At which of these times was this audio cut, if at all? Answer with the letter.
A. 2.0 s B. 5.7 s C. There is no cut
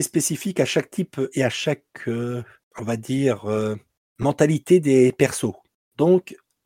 C